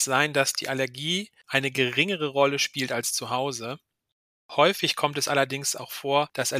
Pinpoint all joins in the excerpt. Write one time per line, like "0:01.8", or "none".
none